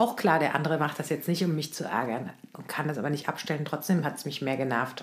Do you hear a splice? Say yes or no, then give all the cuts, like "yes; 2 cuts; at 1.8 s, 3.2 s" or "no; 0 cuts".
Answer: no; 0 cuts